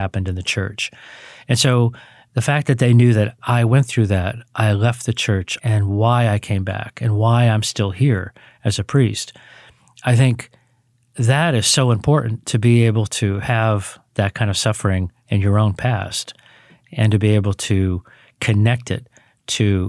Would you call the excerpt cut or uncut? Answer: cut